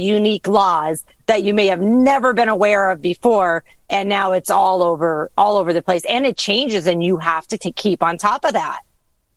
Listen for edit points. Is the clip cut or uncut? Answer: uncut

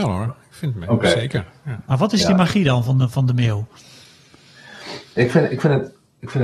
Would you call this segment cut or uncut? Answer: uncut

